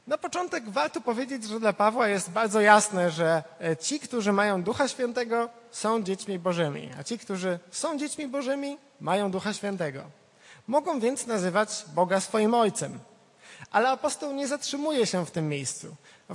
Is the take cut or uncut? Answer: uncut